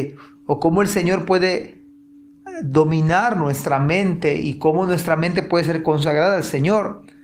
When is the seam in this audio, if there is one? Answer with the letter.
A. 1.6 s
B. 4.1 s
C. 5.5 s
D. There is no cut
D